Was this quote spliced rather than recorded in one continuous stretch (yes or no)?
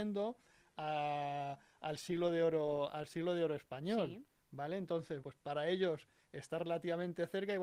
yes